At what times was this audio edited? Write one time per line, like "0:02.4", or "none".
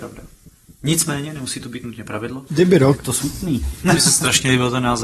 0:02.5

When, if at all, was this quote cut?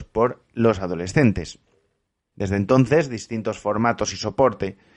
0:02.3

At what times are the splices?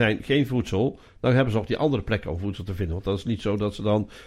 none

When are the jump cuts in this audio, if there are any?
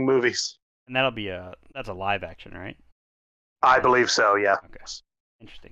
none

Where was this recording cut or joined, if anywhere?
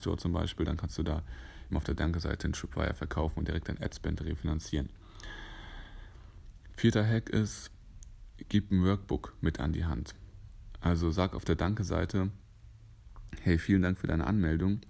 0:01.7

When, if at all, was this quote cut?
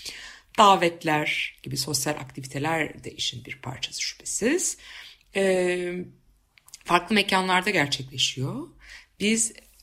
none

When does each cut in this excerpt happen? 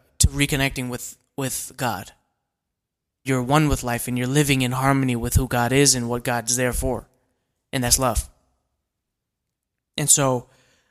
0:03.3

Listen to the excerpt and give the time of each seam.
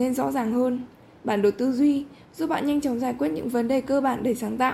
none

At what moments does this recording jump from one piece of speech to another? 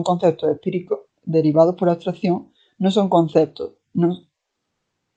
none

